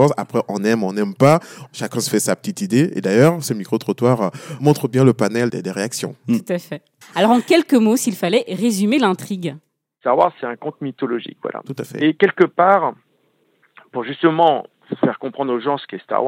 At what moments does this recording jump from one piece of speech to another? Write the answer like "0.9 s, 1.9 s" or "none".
5.5 s, 7.0 s